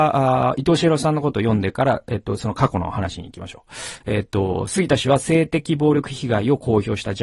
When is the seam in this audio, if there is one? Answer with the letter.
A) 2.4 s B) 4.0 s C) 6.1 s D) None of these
B